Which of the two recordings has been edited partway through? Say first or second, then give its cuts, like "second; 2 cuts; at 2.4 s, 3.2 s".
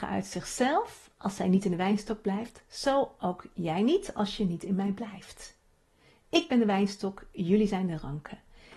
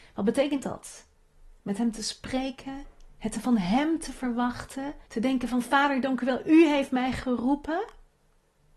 second; 1 cut; at 5.1 s